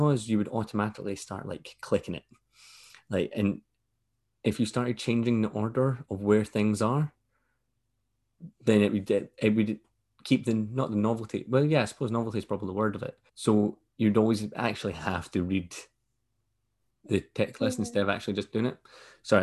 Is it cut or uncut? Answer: cut